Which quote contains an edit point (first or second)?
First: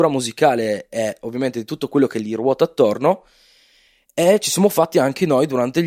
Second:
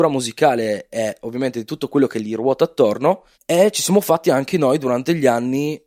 second